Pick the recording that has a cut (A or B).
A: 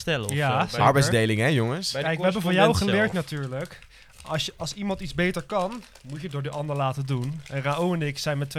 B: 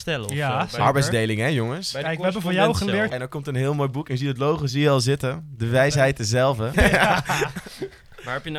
B